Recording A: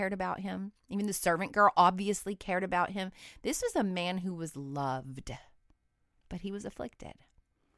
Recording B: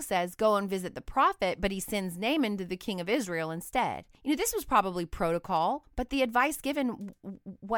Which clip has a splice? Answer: B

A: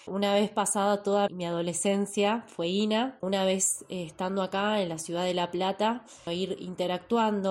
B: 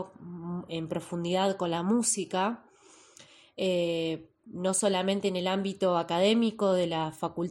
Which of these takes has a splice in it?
A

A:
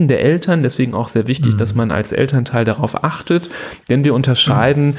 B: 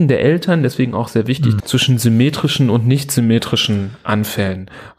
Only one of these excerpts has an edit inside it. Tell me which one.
B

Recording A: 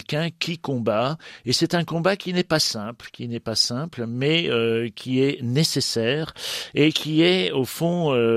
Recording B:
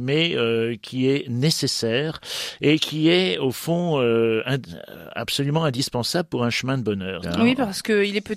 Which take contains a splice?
B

